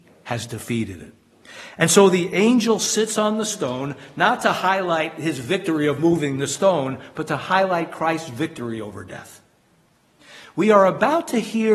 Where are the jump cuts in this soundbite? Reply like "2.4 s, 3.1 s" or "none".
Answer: none